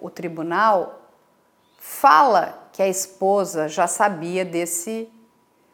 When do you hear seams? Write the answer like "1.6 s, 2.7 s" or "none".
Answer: none